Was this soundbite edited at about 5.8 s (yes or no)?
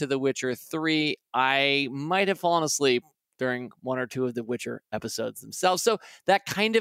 no